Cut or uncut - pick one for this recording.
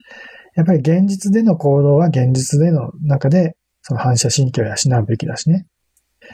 uncut